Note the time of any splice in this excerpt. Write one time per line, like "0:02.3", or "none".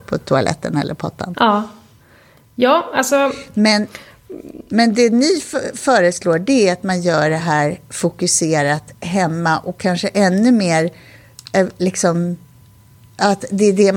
none

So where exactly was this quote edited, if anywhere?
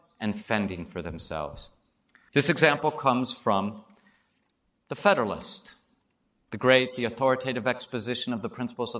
0:02.3

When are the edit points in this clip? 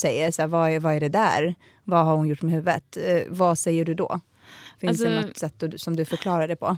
none

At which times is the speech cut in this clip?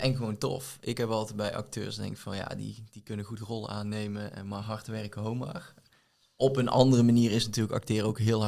none

